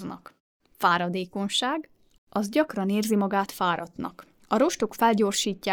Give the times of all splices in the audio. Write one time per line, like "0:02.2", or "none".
0:02.2
0:04.3